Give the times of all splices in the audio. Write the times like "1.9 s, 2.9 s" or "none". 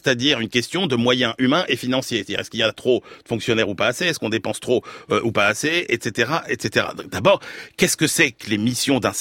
none